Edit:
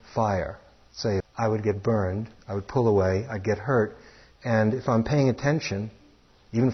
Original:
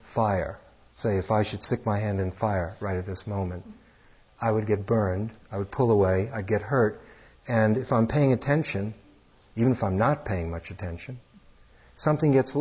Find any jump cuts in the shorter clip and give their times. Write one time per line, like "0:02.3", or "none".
0:01.2